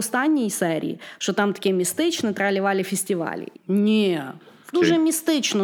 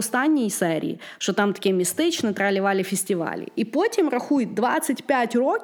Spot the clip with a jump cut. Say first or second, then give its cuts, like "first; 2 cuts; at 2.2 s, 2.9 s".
first; 2 cuts; at 3.5 s, 4.7 s